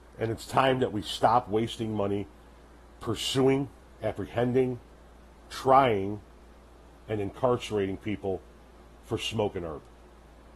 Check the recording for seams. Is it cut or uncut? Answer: cut